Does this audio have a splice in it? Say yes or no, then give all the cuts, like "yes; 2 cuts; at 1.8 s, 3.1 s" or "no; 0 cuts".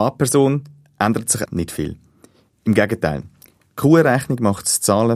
yes; 1 cut; at 1.5 s